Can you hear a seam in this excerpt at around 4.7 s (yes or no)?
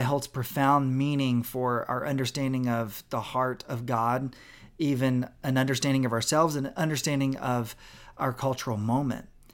no